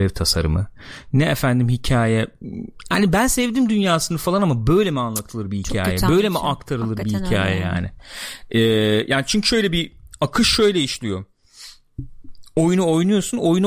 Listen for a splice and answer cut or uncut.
uncut